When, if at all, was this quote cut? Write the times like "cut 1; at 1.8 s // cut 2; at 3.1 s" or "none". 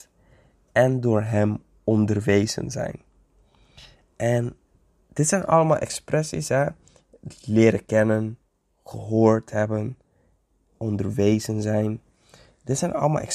none